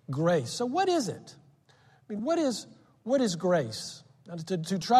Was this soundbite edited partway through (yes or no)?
no